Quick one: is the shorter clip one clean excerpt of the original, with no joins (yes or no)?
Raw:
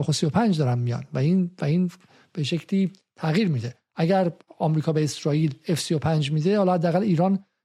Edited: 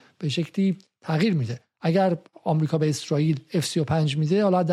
yes